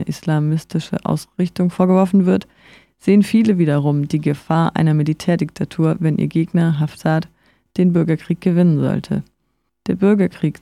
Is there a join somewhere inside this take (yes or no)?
yes